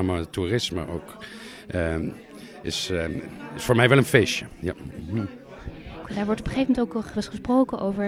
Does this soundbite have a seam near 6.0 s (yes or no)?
yes